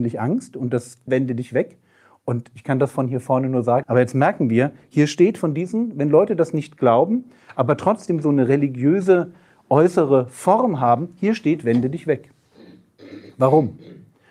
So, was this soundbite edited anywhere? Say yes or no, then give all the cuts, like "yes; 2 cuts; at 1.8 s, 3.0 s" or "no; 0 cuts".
yes; 2 cuts; at 1.1 s, 3.8 s